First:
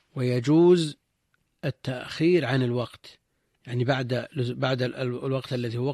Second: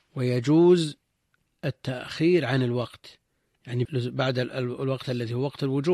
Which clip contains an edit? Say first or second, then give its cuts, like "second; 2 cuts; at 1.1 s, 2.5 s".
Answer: second; 1 cut; at 3.9 s